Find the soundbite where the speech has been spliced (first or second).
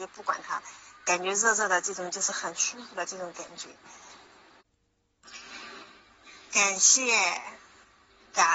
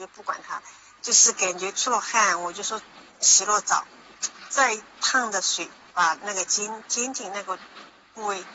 second